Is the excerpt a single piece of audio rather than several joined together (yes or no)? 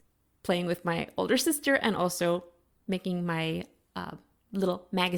yes